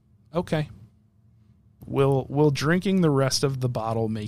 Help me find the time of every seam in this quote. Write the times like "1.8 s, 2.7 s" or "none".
1.8 s